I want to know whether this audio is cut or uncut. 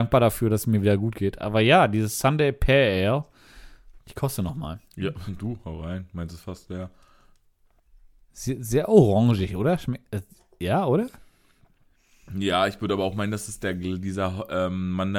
cut